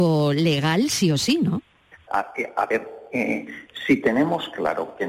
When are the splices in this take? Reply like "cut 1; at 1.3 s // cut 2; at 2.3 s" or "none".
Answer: cut 1; at 2.1 s